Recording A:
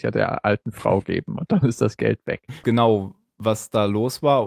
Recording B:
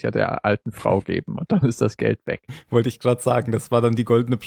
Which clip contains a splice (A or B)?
A